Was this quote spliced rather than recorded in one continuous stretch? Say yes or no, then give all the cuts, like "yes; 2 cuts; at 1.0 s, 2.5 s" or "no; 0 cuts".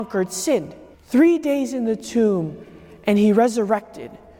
yes; 1 cut; at 0.9 s